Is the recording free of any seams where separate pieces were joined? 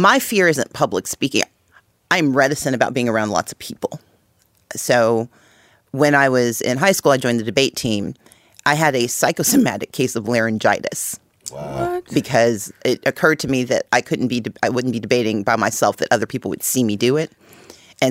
yes; 0 cuts

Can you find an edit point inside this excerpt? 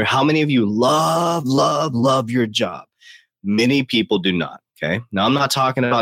yes; 1 cut; at 1.9 s

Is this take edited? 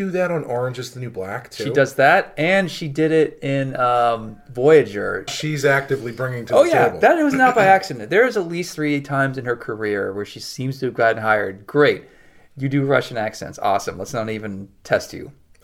yes; 1 cut; at 5.3 s

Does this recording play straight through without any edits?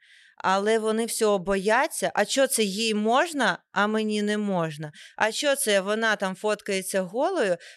yes; 0 cuts

